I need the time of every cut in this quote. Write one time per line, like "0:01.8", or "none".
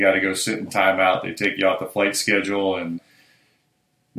none